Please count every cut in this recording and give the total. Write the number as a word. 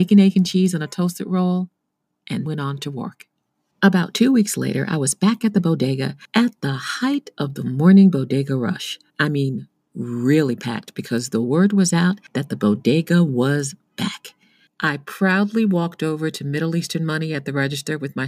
three